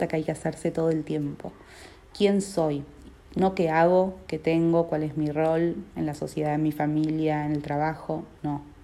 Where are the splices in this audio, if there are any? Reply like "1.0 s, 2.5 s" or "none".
none